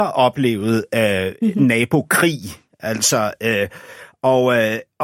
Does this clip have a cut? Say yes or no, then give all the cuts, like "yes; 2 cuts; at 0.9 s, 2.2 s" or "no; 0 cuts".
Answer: no; 0 cuts